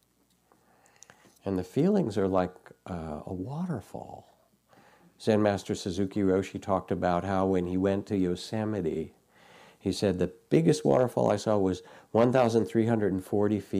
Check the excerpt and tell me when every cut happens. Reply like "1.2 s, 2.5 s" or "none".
none